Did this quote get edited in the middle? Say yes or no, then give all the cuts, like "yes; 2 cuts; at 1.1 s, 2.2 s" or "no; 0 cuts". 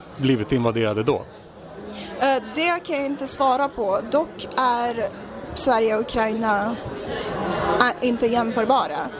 no; 0 cuts